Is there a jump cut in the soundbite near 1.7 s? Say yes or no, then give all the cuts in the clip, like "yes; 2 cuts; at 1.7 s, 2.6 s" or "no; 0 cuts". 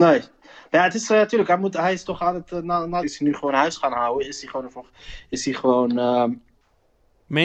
no; 1 cut; at 3.0 s